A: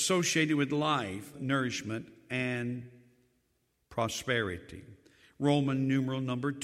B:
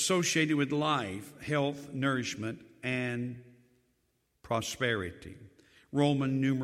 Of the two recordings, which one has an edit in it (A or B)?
A